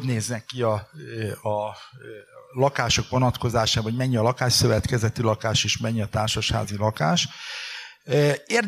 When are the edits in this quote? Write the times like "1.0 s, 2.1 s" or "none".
none